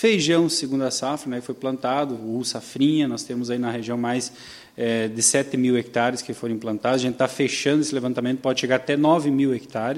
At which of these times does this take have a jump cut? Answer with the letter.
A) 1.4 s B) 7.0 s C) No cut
C